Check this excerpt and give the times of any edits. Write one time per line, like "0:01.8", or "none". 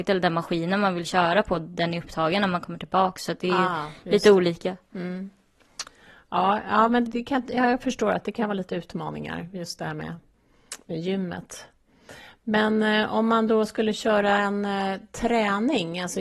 0:07.1